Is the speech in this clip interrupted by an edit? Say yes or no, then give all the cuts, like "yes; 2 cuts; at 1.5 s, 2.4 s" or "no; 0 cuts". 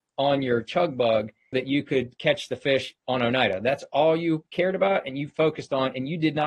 yes; 1 cut; at 1.5 s